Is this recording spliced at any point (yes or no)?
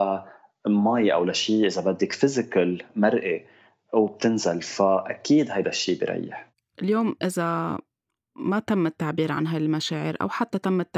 no